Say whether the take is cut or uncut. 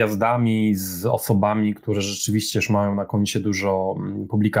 uncut